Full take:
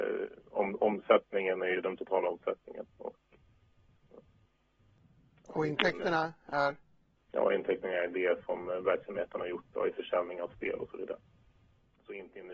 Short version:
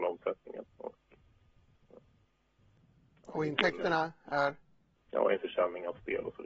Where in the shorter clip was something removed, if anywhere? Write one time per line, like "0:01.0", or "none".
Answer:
0:05.3